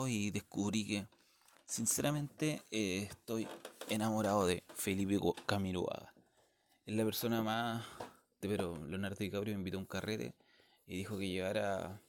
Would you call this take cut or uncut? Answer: cut